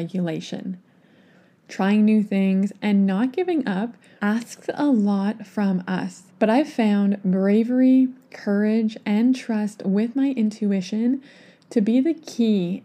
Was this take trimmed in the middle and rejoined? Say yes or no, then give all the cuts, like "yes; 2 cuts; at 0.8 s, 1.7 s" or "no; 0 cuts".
yes; 2 cuts; at 4.2 s, 6.3 s